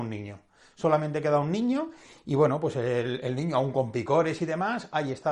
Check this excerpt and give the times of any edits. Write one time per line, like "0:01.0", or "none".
none